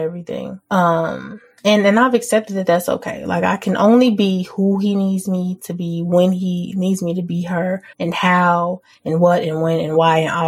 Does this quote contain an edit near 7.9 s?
yes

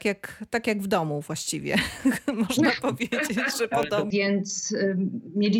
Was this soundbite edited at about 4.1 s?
yes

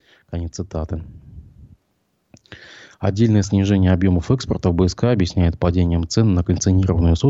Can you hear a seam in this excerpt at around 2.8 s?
no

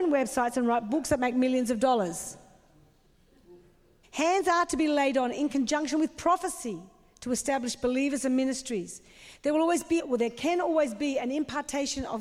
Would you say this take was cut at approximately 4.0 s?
yes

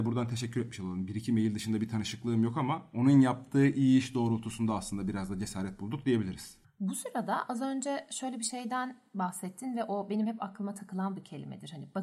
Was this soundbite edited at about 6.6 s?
no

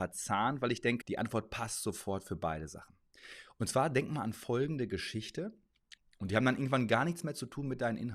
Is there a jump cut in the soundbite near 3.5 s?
no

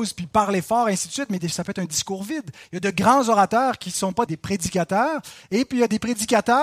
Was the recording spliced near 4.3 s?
yes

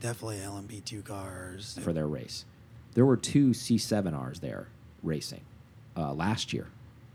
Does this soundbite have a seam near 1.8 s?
yes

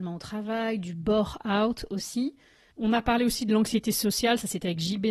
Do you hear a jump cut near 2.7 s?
yes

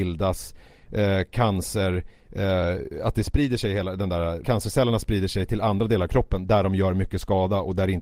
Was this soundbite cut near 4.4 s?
yes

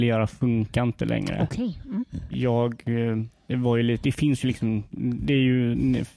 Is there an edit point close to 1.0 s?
no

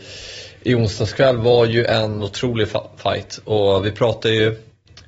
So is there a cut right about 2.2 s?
yes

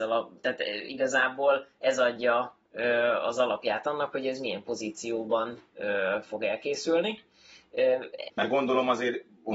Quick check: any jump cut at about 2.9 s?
no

